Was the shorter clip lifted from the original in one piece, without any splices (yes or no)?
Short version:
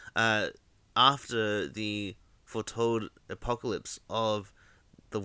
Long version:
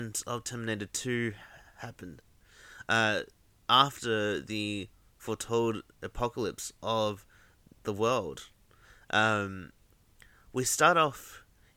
yes